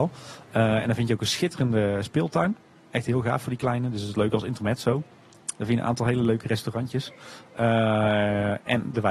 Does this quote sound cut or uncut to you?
cut